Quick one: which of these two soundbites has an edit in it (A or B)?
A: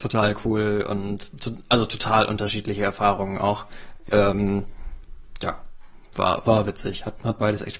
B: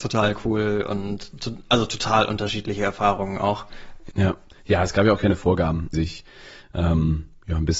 B